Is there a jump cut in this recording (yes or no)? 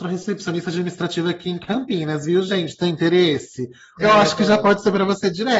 yes